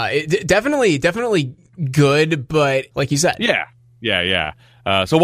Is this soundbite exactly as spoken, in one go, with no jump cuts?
no; 1 cut; at 2.9 s

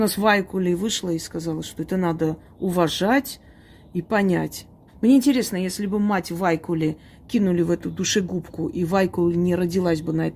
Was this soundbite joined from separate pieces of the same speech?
yes; 1 cut; at 4.9 s

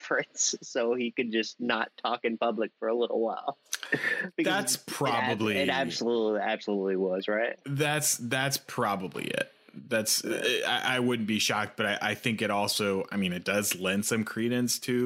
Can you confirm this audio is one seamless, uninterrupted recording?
yes; 0 cuts

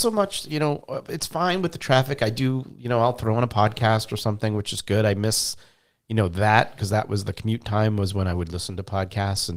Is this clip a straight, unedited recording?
yes; 0 cuts

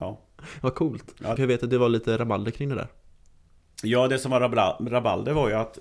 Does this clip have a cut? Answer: yes; 1 cut; at 1.4 s

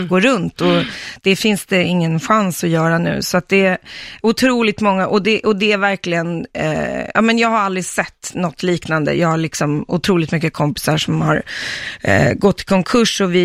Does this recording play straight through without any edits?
yes; 0 cuts

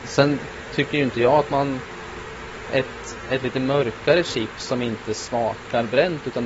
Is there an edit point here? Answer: no; 0 cuts

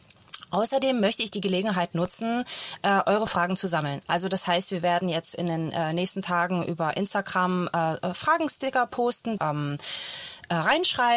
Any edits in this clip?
yes; 1 cut; at 9.4 s

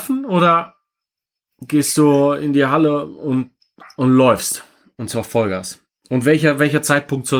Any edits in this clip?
no; 0 cuts

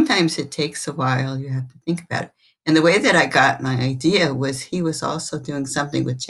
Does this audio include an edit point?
no; 0 cuts

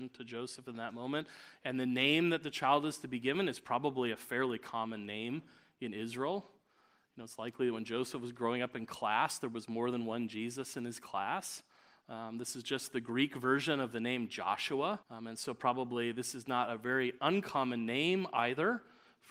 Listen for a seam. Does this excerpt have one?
yes; 1 cut; at 15.0 s

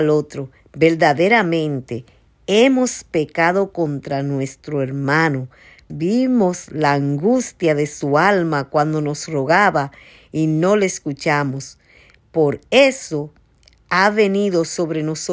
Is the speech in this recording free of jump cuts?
no; 1 cut; at 5.9 s

